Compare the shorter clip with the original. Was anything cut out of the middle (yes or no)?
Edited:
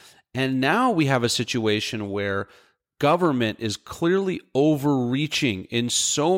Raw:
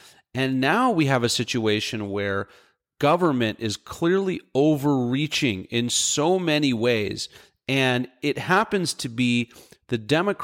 no